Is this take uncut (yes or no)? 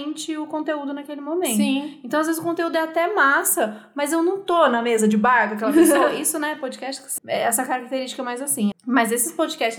no